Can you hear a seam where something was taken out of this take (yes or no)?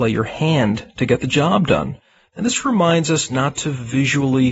yes